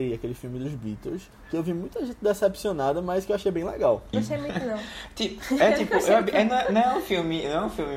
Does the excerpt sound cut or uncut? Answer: cut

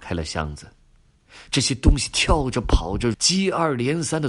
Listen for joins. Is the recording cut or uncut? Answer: cut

